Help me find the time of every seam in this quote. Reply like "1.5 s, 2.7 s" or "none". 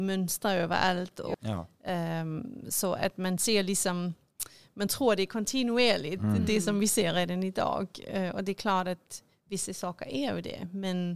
1.3 s